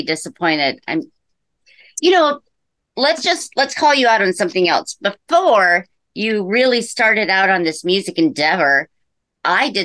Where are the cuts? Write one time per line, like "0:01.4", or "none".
none